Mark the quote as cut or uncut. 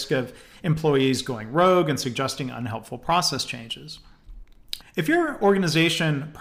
cut